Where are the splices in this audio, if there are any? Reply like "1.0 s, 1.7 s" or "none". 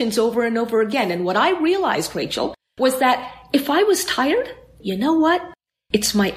4.8 s